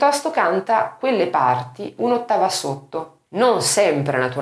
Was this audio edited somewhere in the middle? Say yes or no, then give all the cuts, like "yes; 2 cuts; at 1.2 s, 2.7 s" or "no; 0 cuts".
yes; 1 cut; at 3.3 s